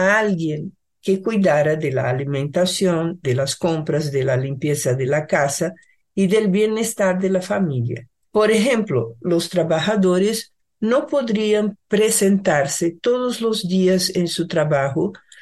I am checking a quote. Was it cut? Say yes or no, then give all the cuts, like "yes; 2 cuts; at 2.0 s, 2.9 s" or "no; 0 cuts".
yes; 1 cut; at 8.3 s